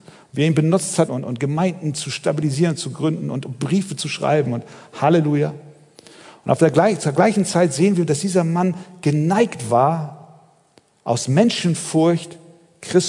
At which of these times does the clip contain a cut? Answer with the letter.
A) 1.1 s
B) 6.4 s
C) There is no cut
A